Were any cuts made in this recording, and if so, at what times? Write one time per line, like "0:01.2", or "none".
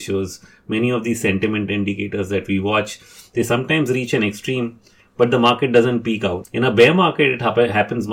0:06.4